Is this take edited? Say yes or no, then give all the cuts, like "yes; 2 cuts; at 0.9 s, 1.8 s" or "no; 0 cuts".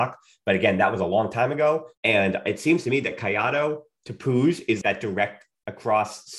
yes; 2 cuts; at 1.9 s, 4.8 s